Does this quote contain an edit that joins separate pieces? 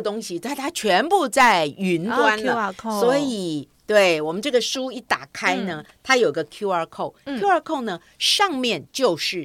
no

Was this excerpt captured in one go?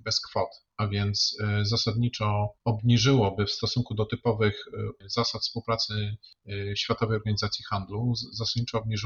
no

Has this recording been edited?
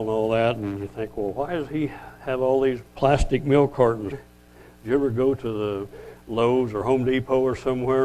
yes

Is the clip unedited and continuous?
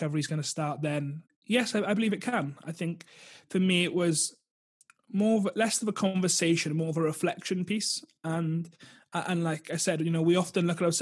no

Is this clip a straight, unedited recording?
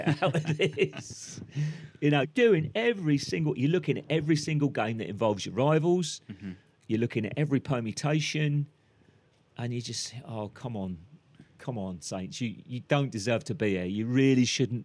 no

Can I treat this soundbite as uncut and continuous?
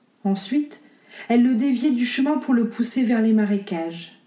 no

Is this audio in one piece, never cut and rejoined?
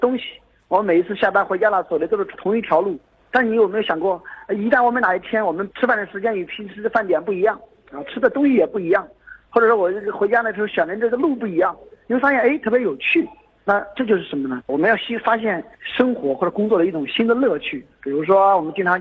no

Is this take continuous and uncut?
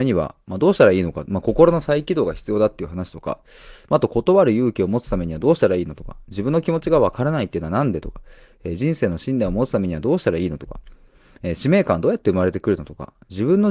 yes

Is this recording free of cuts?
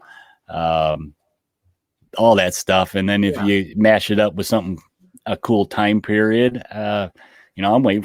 yes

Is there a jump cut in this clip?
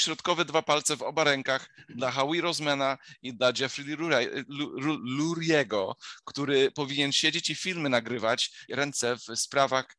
yes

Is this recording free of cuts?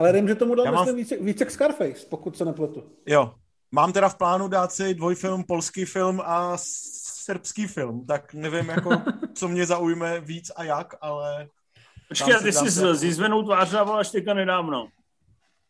yes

